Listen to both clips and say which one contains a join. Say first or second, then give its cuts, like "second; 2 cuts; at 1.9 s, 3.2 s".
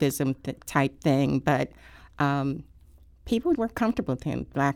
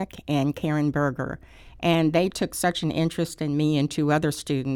first; 1 cut; at 3.6 s